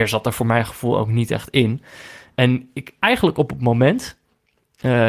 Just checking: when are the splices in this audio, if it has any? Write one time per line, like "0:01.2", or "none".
0:03.0